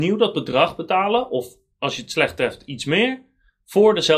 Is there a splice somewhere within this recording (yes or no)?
no